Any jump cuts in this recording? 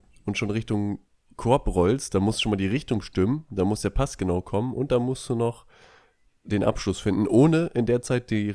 no; 0 cuts

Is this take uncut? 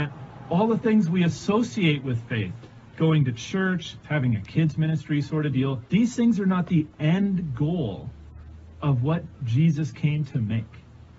no; 2 cuts; at 4.0 s, 5.9 s

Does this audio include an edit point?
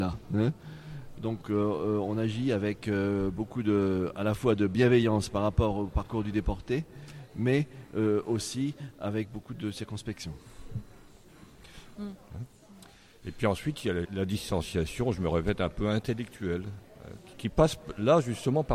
yes; 3 cuts; at 12.0 s, 14.0 s, 17.3 s

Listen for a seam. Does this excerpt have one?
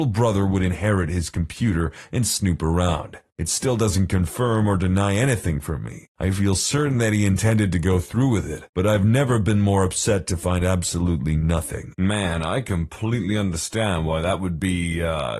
no; 0 cuts

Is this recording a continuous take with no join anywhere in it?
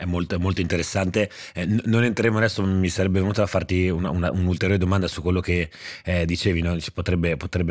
yes; 0 cuts

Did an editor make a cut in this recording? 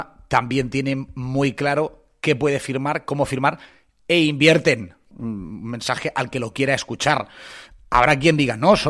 yes; 1 cut; at 5.1 s

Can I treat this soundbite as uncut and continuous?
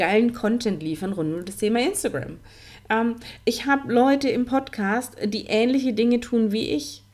yes; 0 cuts

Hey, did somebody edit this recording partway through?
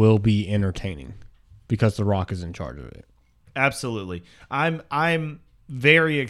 yes; 1 cut; at 3.4 s

